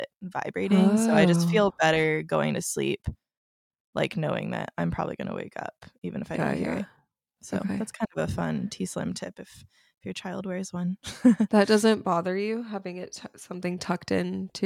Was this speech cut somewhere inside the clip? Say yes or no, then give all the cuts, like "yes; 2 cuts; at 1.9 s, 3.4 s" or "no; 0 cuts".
no; 0 cuts